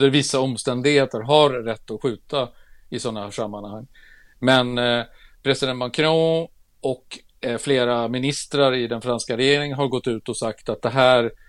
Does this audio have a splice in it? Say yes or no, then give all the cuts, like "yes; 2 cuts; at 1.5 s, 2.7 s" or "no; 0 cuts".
no; 0 cuts